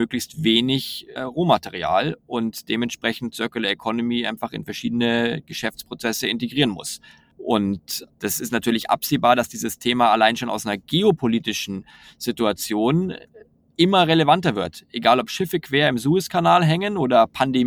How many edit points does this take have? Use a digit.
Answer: 1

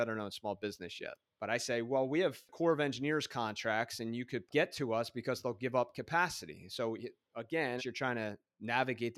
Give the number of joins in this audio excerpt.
2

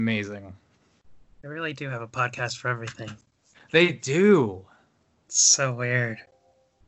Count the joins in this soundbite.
0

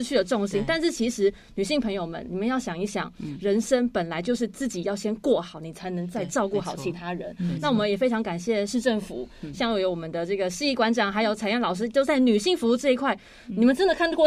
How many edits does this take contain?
0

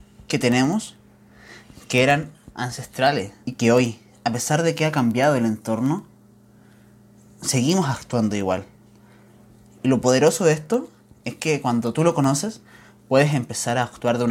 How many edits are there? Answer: 1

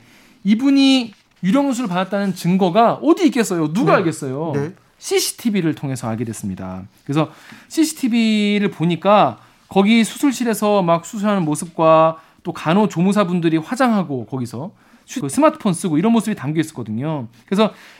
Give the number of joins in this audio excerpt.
1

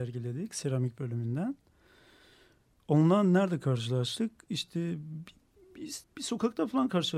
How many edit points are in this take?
1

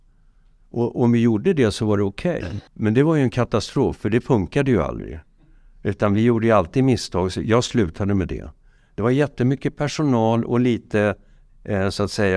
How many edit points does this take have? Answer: 2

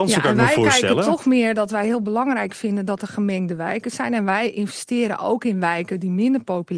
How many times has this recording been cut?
0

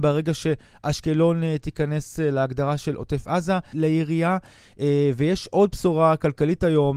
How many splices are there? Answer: 1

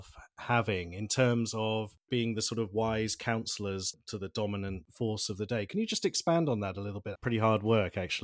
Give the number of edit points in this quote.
1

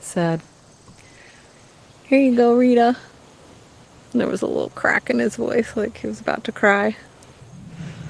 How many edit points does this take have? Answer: 0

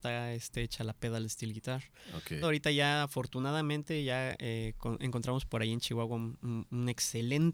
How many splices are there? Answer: 1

